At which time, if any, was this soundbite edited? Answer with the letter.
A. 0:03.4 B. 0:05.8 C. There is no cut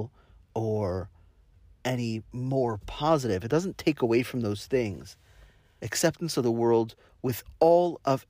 B